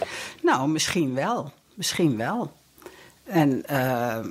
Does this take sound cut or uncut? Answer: uncut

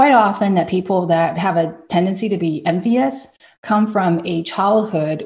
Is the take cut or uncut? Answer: uncut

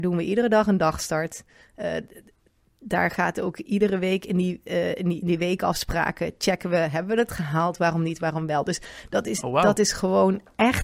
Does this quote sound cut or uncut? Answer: uncut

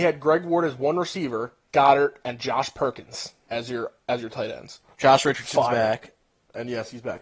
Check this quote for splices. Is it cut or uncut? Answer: cut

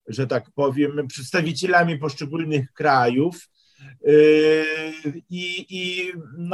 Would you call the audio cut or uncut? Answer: uncut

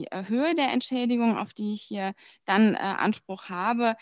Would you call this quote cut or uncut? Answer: uncut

